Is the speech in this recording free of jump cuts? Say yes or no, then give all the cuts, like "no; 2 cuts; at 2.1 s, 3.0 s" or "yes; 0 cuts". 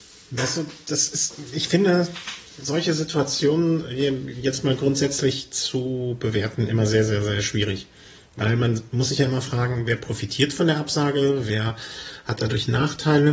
yes; 0 cuts